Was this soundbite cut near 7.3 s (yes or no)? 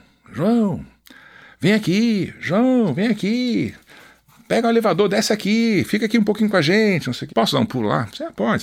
yes